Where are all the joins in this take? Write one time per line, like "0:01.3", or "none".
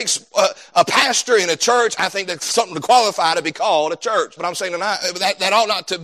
0:04.4